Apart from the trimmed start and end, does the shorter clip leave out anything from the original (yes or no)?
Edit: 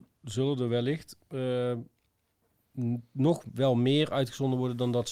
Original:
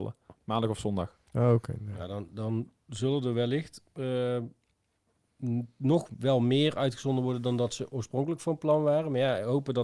no